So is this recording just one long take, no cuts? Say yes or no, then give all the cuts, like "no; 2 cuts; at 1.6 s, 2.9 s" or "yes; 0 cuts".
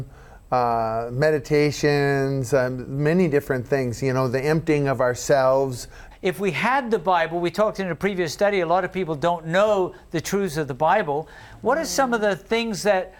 no; 1 cut; at 6.1 s